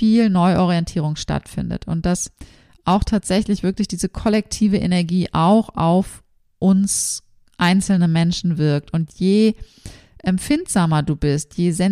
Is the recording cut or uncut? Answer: uncut